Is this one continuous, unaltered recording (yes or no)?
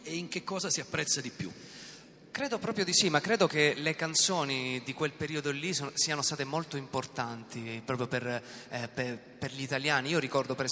yes